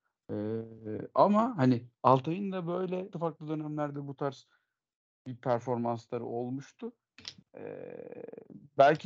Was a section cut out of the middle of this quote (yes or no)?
yes